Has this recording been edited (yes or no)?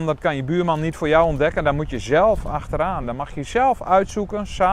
no